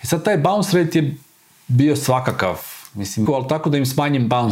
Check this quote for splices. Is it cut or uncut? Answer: cut